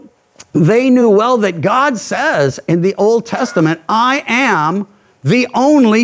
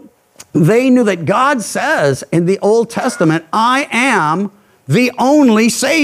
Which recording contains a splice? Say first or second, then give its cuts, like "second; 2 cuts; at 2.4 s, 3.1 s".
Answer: second; 1 cut; at 1.0 s